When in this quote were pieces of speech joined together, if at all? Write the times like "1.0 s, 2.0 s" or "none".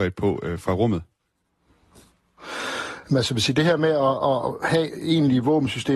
none